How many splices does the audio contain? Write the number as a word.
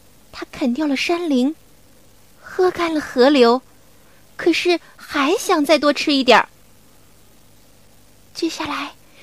zero